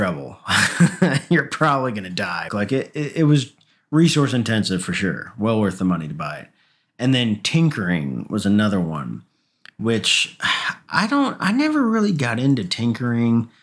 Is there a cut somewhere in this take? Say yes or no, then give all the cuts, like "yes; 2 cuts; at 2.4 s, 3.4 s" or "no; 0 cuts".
yes; 1 cut; at 2.5 s